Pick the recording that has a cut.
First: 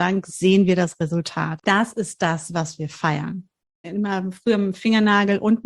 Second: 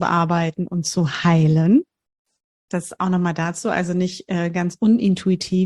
first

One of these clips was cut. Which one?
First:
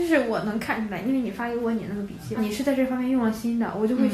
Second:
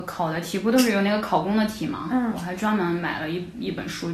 first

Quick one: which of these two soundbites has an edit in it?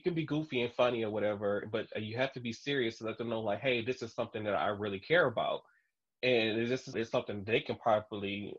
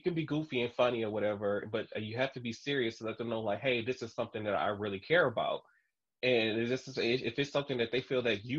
first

